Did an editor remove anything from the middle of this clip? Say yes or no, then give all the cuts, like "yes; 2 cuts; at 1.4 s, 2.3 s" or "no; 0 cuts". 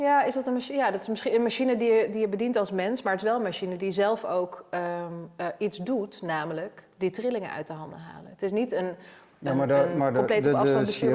no; 0 cuts